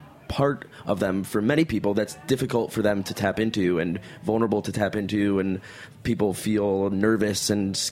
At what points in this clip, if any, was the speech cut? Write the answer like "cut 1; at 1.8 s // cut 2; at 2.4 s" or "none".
none

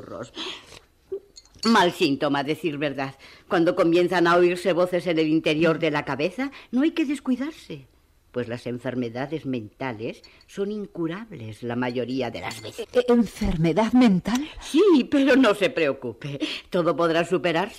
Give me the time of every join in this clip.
cut 1; at 12.8 s

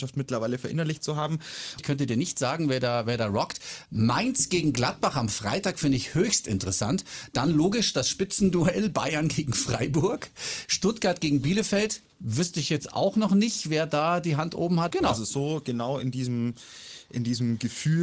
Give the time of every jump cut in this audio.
cut 1; at 1.8 s // cut 2; at 14.9 s

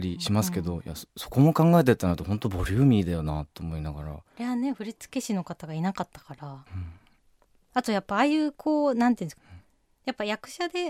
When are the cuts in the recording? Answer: cut 1; at 6.7 s // cut 2; at 9.4 s

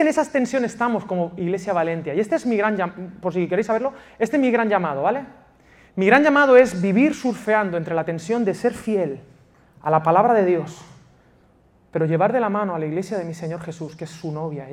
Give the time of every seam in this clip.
none

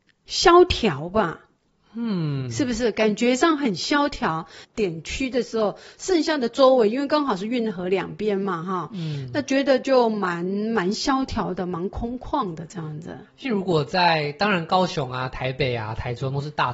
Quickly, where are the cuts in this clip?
cut 1; at 4.6 s

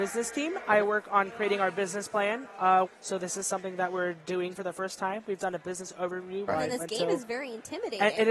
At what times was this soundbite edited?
cut 1; at 2.9 s // cut 2; at 5.4 s // cut 3; at 6.5 s

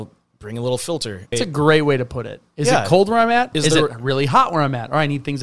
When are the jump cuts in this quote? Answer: cut 1; at 1.3 s // cut 2; at 3.5 s

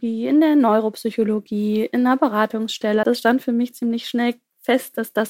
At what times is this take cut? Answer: cut 1; at 3.0 s

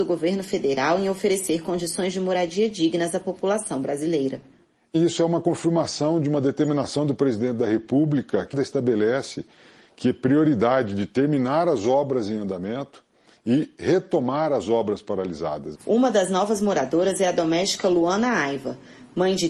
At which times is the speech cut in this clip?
cut 1; at 8.5 s // cut 2; at 15.7 s

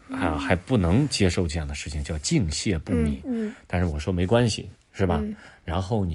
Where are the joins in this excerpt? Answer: cut 1; at 3.2 s // cut 2; at 4.8 s

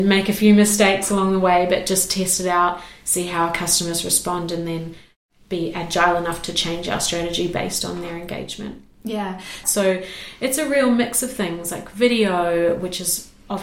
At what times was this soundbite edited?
cut 1; at 9.6 s

